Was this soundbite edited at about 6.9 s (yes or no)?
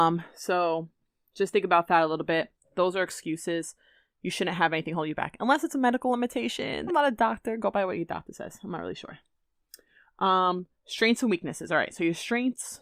yes